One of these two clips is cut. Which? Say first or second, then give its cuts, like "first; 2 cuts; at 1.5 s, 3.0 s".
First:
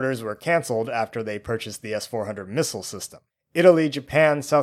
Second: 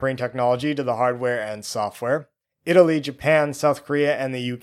second; 1 cut; at 2.4 s